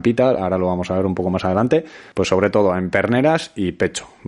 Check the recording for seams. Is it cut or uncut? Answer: cut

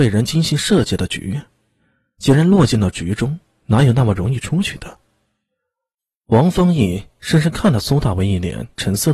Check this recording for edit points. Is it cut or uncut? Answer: uncut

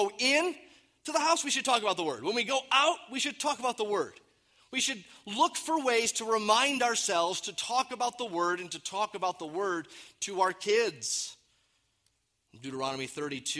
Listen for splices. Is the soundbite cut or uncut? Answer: uncut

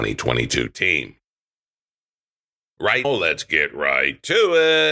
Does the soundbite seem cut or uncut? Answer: cut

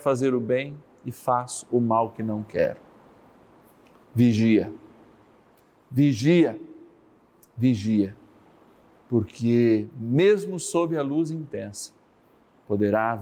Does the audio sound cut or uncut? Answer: uncut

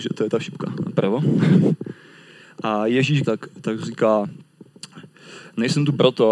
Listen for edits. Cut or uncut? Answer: cut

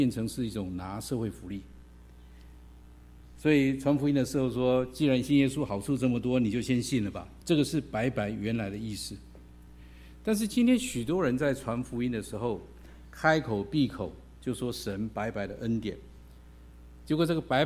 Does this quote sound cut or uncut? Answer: cut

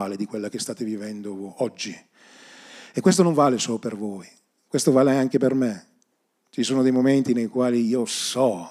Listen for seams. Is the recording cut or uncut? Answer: uncut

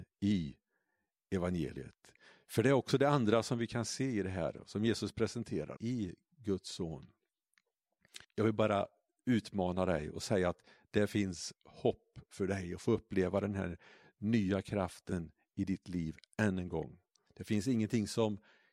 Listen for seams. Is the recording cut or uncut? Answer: cut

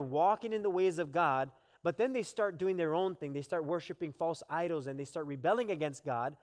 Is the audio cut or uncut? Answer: uncut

